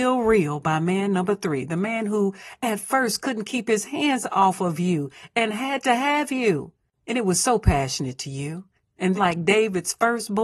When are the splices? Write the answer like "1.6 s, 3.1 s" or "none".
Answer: 9.2 s

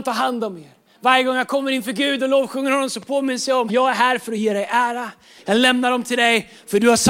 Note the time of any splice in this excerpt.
3.7 s, 5.4 s

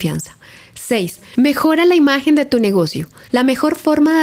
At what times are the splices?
3.3 s

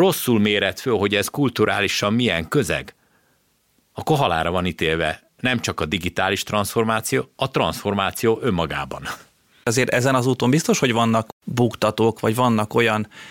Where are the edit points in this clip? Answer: none

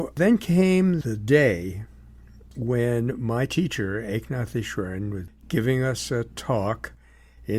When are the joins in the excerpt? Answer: none

